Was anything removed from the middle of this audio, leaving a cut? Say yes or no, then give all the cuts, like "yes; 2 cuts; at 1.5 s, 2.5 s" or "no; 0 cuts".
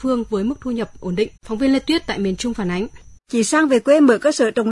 yes; 2 cuts; at 1.4 s, 3.2 s